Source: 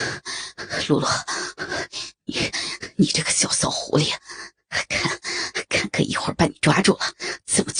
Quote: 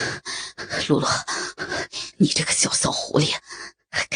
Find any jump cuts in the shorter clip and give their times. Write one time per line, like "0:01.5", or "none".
0:02.1

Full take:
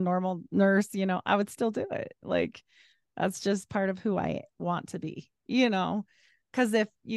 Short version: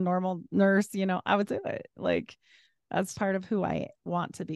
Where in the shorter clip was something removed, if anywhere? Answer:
0:01.5
0:03.1

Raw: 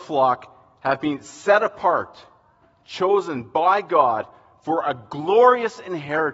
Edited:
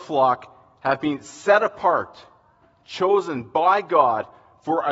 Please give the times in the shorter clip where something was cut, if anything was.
none

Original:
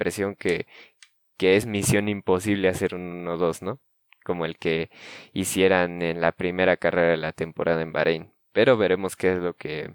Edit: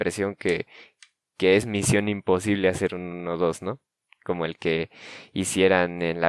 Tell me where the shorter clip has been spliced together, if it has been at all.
none

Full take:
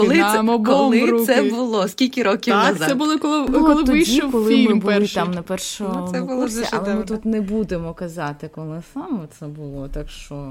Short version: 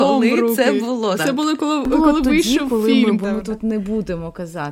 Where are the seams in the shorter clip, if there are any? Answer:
0:01.2
0:03.2

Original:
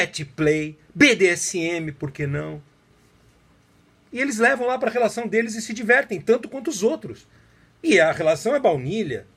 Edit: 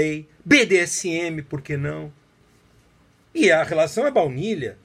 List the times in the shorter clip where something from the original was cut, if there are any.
0:03.2

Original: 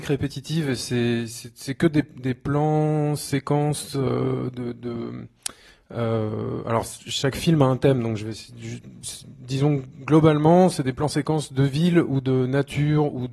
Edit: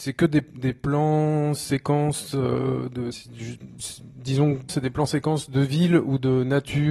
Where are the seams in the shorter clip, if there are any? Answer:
0:03.1
0:04.7

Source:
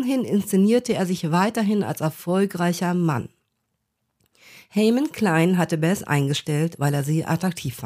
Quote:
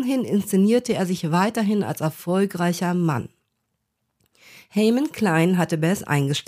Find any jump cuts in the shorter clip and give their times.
none

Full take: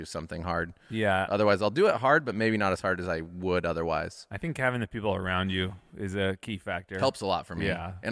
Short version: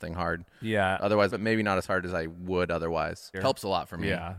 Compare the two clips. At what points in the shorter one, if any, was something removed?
0:01.3
0:03.3

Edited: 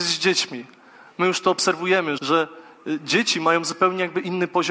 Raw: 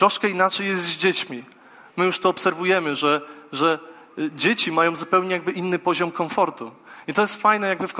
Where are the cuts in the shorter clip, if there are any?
0:02.2

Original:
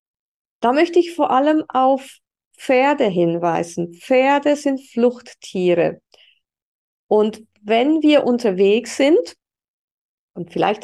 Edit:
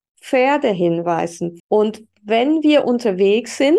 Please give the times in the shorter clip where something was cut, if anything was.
0:01.6

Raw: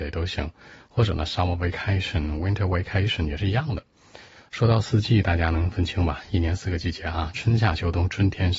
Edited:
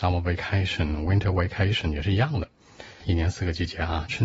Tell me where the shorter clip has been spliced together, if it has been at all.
0:03.0

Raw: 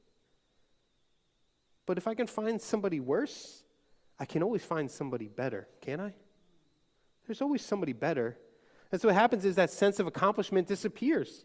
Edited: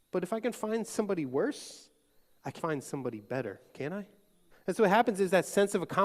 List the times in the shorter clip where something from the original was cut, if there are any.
0:02.6
0:04.5

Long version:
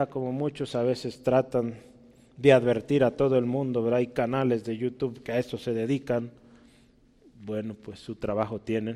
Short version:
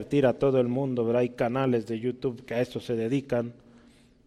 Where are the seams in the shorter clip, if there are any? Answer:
none

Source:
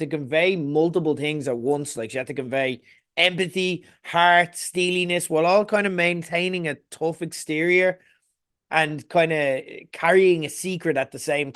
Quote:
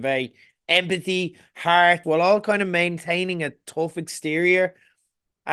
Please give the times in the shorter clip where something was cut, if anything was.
0:02.0

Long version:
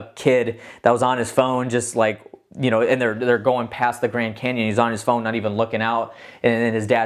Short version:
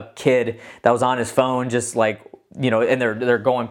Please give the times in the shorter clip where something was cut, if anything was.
none

